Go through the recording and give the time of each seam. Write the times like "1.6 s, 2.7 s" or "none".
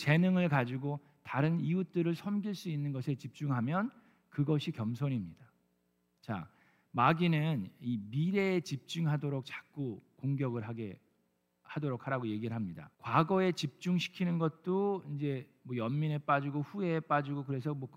6.2 s, 12.9 s